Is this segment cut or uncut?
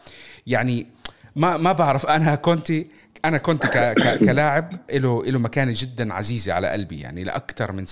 uncut